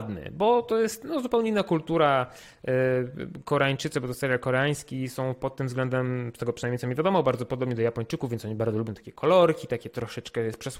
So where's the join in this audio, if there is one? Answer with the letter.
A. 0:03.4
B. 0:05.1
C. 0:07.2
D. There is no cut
D